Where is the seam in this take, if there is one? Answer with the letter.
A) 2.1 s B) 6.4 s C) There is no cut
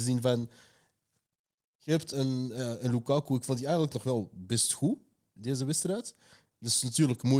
A